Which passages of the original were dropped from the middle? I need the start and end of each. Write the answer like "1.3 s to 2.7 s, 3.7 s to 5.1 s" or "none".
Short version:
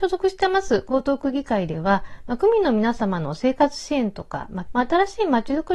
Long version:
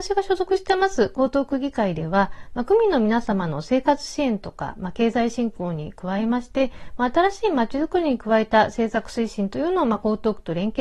4.9 s to 6.9 s